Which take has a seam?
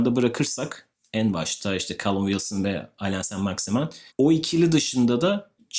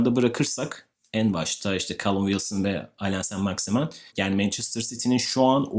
second; 1 cut; at 4.1 s

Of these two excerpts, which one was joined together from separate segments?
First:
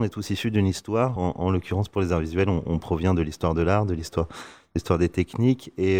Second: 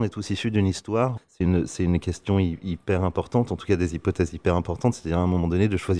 second; 1 cut; at 1.2 s

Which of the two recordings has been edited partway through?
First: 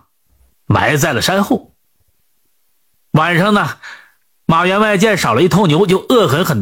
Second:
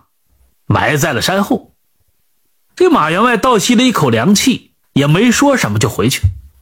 second; 2 cuts; at 2.7 s, 4.8 s

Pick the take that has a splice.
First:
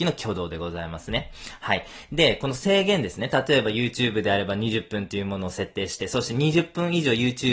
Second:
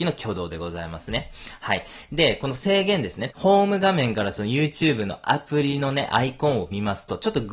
second; 1 cut; at 3.3 s

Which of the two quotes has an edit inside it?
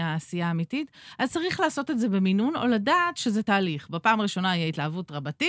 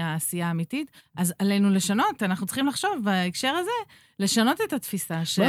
second; 1 cut; at 1.0 s

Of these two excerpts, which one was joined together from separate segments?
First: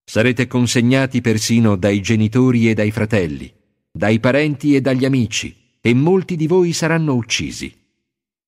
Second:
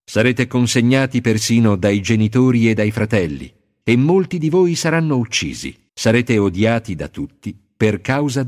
second; 2 cuts; at 3.8 s, 5.9 s

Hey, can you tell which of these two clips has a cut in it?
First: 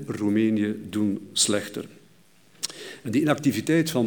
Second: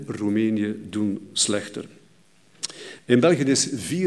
second; 1 cut; at 3.0 s

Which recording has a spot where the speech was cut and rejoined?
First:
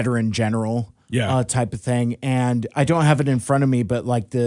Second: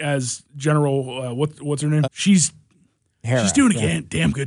second; 1 cut; at 2.0 s

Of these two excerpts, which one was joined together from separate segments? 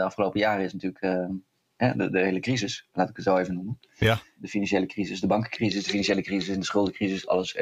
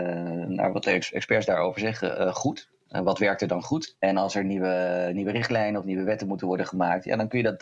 second; 1 cut; at 3.9 s

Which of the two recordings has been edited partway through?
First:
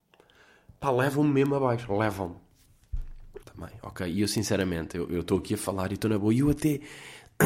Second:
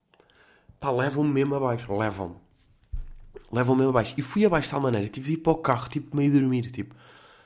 first; 1 cut; at 3.4 s

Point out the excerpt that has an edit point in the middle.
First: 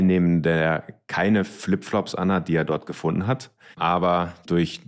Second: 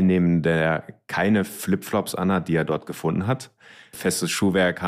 first; 1 cut; at 3.7 s

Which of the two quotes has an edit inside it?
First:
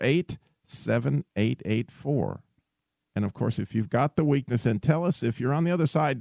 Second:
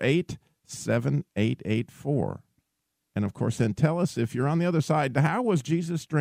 second; 1 cut; at 3.6 s

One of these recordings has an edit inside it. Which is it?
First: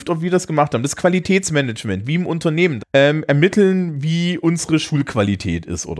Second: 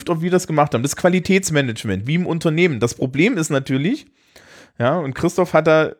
first; 1 cut; at 2.8 s

